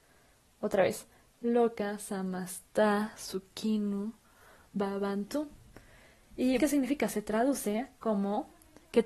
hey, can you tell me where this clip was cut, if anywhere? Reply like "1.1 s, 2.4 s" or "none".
6.6 s